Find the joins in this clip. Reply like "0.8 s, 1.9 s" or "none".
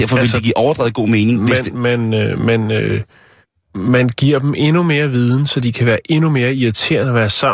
none